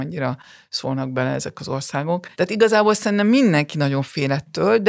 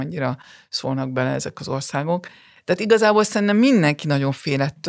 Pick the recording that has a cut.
first; 1 cut; at 2.3 s

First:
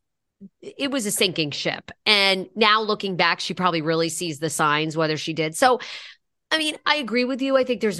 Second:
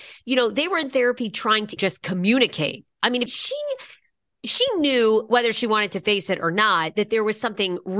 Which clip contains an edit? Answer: second; 2 cuts; at 1.8 s, 3.3 s

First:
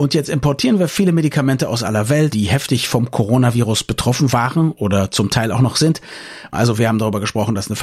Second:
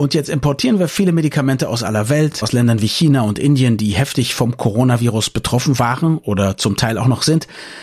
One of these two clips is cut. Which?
first; 2 cuts; at 2.3 s, 6.5 s

